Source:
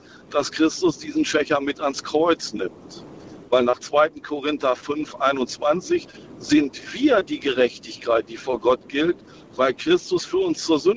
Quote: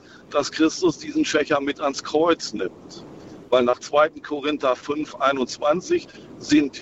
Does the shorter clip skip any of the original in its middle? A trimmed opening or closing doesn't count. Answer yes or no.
no